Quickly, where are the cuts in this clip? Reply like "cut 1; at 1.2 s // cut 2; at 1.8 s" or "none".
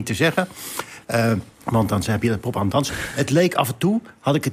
cut 1; at 1.5 s // cut 2; at 2.9 s

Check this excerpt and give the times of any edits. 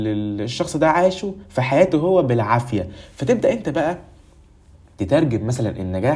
none

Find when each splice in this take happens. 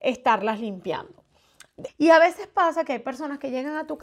cut 1; at 1.9 s

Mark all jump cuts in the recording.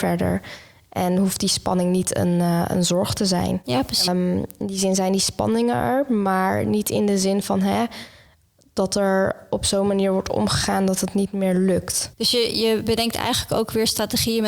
cut 1; at 4.1 s // cut 2; at 12.1 s

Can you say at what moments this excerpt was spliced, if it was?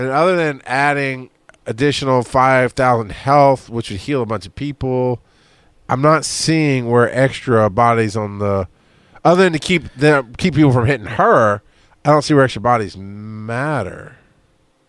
none

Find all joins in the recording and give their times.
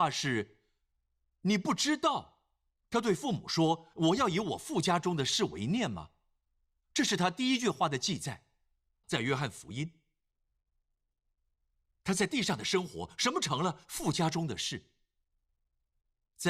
cut 1; at 9.0 s

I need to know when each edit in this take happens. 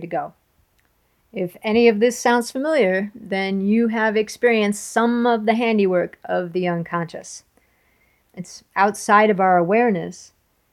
cut 1; at 8.3 s

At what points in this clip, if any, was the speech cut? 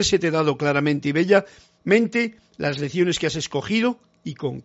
none

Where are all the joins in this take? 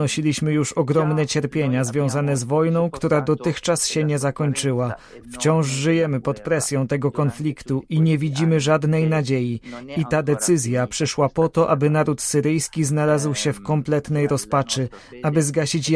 none

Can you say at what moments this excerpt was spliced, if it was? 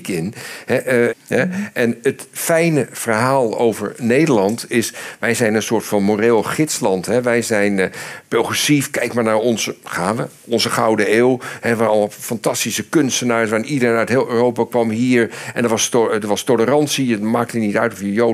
cut 1; at 1.1 s

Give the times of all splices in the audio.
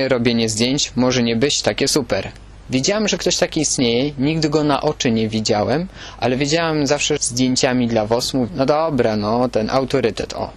cut 1; at 2.6 s // cut 2; at 7.2 s // cut 3; at 8.5 s

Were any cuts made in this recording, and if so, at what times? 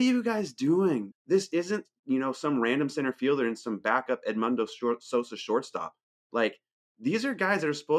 cut 1; at 1.1 s

